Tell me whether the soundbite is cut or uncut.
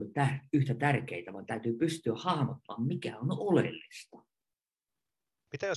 uncut